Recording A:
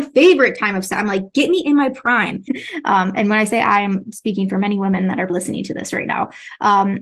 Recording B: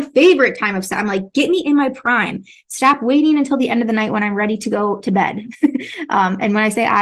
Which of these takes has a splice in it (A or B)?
A